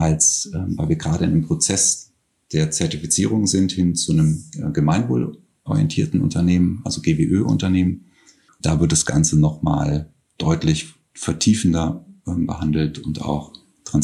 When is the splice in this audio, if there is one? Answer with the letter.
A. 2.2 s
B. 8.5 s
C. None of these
B